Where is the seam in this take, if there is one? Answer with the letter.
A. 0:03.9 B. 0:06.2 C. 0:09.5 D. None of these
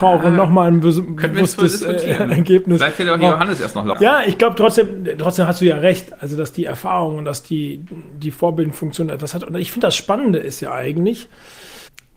A